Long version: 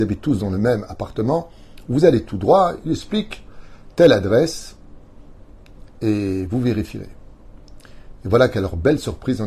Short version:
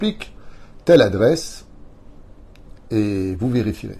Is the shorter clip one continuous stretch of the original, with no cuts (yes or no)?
yes